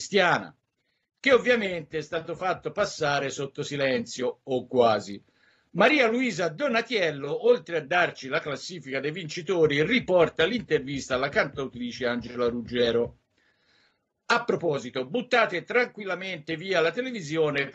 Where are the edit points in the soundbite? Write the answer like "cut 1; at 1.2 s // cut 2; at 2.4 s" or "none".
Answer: none